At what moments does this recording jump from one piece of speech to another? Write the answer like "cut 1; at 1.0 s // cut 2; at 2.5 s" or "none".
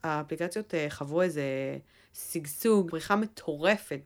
cut 1; at 2.9 s